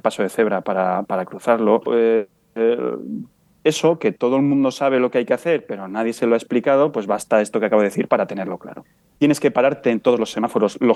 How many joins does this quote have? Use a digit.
2